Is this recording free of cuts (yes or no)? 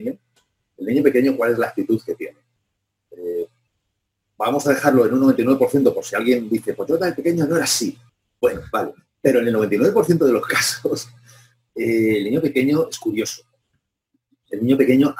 yes